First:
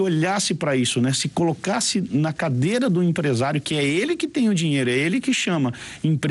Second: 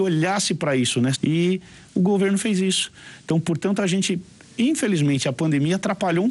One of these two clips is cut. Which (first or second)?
second